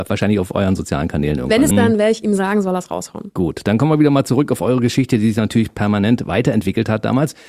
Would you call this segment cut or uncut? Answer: cut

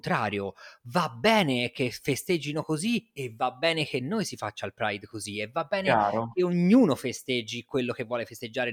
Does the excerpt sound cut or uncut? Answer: uncut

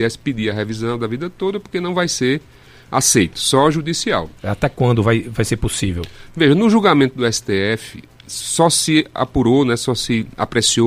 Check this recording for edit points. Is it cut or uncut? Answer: cut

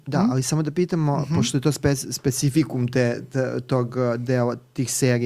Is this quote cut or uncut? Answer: uncut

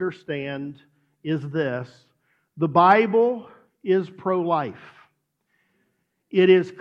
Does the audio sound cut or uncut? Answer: uncut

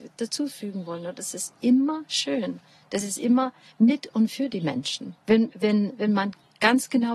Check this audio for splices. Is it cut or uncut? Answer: cut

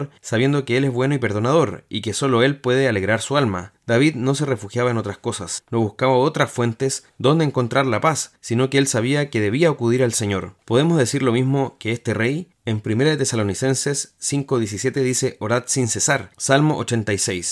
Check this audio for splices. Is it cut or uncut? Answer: cut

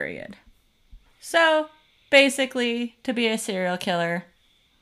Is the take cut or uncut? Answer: cut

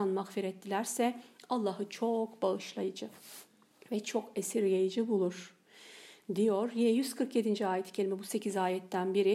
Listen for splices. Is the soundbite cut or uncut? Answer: uncut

